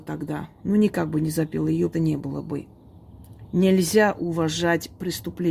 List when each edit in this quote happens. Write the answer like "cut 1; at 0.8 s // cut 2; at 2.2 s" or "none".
cut 1; at 1.9 s